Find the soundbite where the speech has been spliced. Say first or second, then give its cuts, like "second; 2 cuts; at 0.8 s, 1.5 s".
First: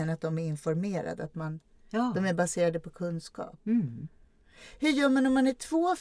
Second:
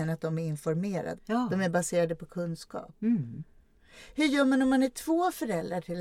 second; 1 cut; at 1.2 s